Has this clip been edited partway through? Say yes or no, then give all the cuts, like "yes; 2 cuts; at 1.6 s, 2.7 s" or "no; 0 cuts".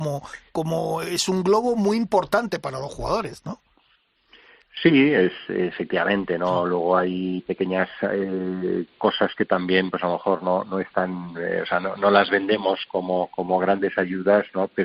no; 0 cuts